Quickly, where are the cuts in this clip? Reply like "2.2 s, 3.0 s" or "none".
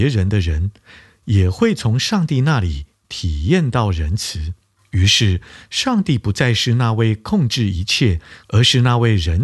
4.7 s, 8.4 s